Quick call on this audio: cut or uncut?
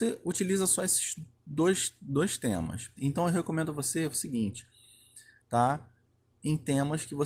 cut